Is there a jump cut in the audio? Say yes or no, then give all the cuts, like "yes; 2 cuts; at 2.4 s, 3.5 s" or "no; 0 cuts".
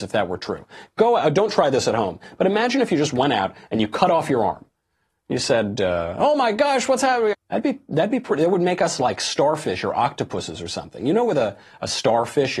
yes; 1 cut; at 7.3 s